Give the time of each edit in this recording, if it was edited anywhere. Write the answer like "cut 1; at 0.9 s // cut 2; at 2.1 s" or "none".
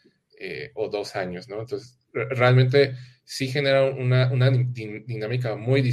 none